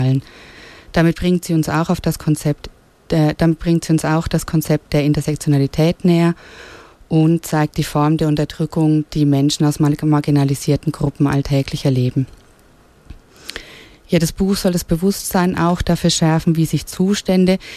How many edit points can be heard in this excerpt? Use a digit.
0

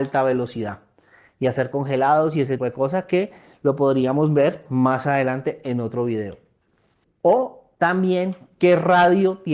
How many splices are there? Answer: 2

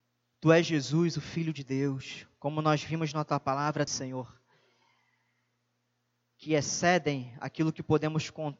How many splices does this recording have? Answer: 1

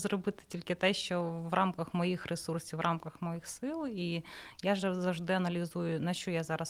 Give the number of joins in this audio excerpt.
0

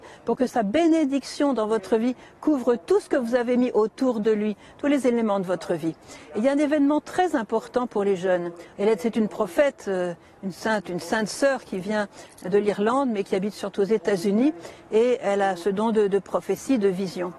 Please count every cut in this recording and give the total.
1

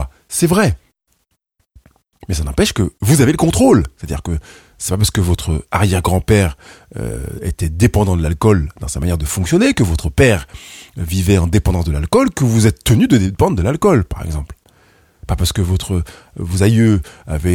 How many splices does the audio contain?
0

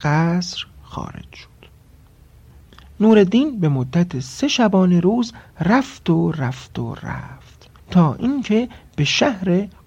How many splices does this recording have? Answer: 1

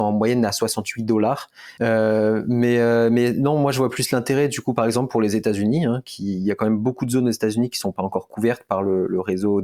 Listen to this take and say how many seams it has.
1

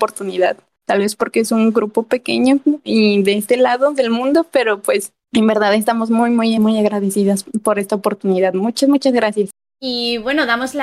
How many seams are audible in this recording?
0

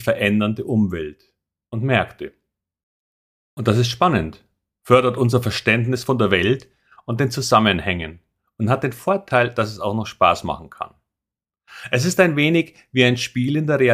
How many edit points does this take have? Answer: 0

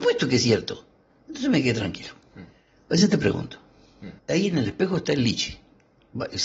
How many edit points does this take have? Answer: 1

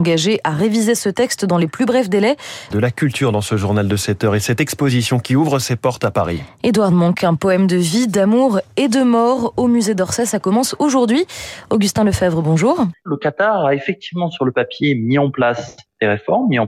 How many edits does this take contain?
2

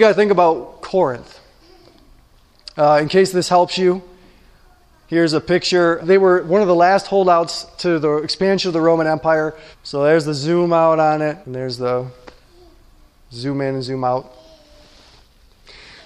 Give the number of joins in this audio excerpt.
3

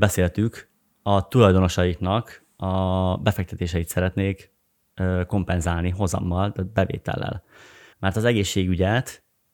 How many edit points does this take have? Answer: 1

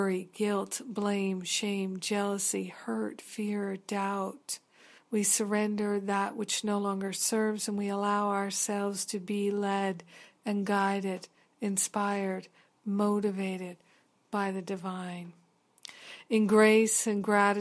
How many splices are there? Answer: 1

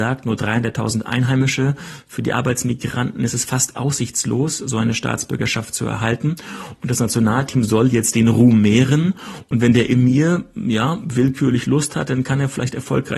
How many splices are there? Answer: 0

